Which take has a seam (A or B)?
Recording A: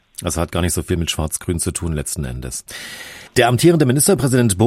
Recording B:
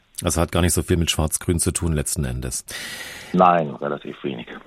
A